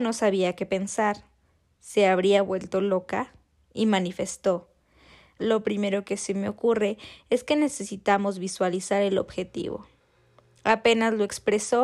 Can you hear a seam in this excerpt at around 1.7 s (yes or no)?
no